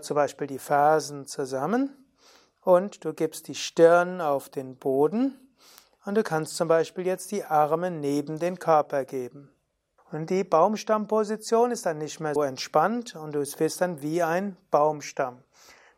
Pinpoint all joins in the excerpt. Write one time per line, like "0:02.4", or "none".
0:10.0
0:12.4